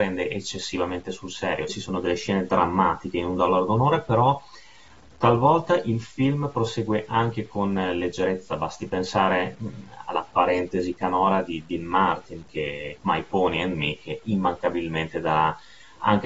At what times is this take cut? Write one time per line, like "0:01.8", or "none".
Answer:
0:01.7
0:13.0